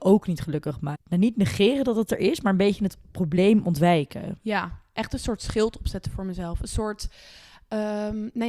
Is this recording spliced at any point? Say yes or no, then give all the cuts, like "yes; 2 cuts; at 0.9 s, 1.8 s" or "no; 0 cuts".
yes; 1 cut; at 0.9 s